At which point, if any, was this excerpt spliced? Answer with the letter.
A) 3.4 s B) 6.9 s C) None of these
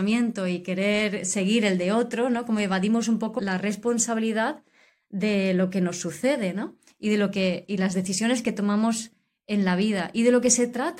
A